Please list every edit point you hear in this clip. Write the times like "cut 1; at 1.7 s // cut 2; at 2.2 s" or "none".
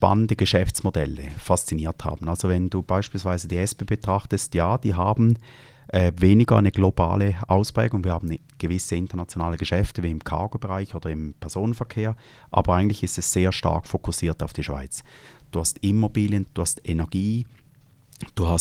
cut 1; at 15.4 s // cut 2; at 16.4 s